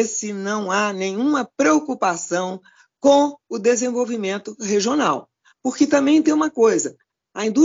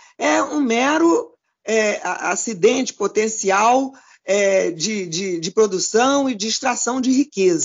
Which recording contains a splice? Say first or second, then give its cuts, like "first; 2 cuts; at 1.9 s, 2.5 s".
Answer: first; 1 cut; at 5.5 s